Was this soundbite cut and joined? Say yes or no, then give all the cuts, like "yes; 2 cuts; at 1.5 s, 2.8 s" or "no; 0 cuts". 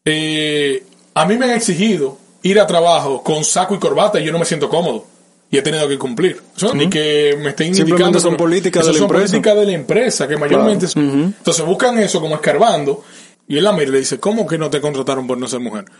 yes; 3 cuts; at 6.7 s, 10.9 s, 13.3 s